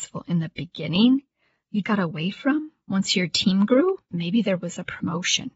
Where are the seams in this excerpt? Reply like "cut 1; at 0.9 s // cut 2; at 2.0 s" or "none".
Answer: cut 1; at 1.8 s // cut 2; at 4.1 s